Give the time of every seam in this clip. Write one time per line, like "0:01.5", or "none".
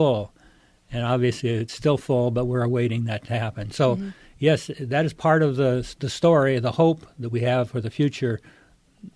none